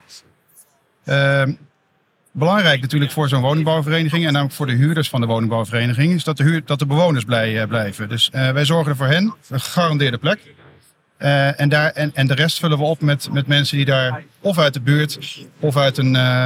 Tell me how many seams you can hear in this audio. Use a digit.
0